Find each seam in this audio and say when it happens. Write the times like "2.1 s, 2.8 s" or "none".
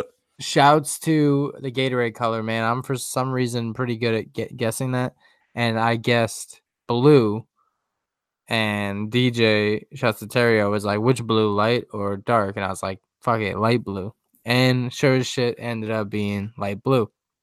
none